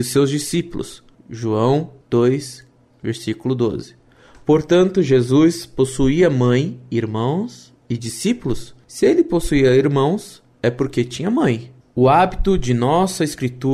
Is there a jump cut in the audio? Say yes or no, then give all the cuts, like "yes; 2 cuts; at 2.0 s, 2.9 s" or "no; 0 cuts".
no; 0 cuts